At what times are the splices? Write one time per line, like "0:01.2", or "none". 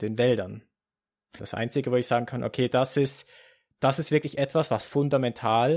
0:01.4
0:03.7